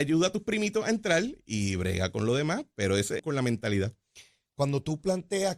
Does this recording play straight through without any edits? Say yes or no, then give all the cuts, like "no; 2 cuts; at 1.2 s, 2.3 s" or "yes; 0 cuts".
no; 1 cut; at 3.2 s